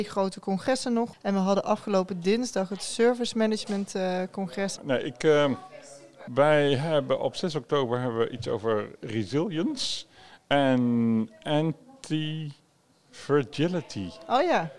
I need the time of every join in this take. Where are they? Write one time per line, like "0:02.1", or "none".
0:01.1
0:04.8
0:06.3